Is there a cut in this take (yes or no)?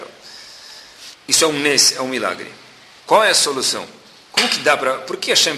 yes